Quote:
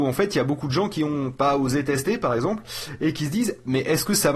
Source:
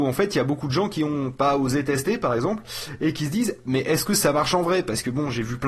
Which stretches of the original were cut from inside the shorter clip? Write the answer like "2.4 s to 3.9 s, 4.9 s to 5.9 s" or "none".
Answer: none